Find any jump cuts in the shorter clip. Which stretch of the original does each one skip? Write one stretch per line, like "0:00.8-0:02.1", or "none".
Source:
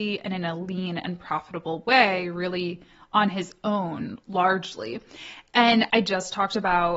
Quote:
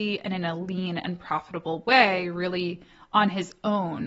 none